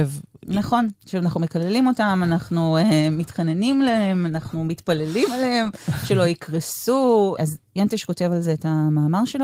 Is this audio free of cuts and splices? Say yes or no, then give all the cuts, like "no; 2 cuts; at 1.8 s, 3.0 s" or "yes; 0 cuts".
no; 1 cut; at 7.4 s